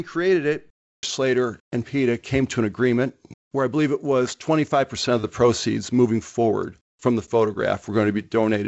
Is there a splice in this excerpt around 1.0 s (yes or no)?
yes